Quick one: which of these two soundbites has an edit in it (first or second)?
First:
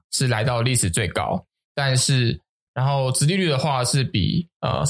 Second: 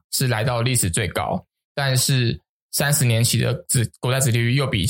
first